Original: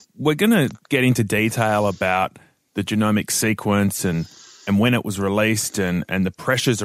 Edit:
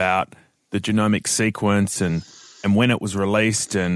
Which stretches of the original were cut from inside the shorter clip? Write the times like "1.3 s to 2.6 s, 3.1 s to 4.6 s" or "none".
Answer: none